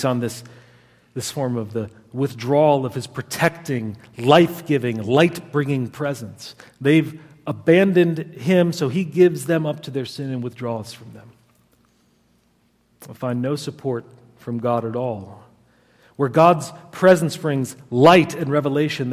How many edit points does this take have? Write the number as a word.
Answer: zero